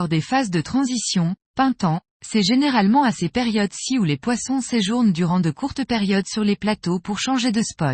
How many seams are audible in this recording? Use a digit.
1